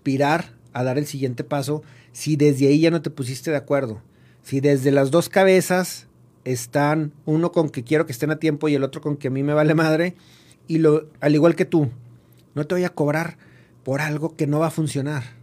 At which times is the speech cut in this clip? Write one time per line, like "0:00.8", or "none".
0:10.5

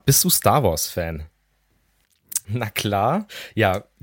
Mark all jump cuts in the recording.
0:02.4

